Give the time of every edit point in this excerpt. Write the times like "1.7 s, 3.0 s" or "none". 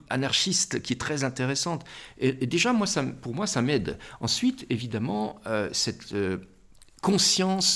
none